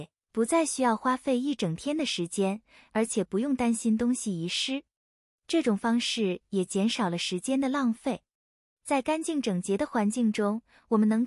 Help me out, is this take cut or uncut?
uncut